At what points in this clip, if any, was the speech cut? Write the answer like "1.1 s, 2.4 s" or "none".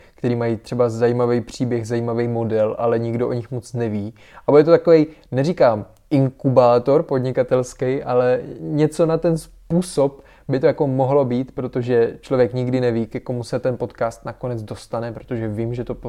none